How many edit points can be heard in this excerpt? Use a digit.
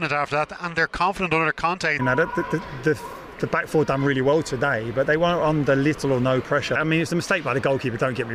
2